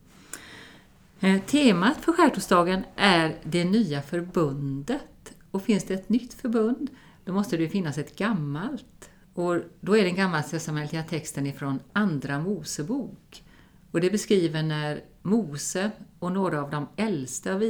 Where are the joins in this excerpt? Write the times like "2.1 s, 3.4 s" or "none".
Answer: 9.2 s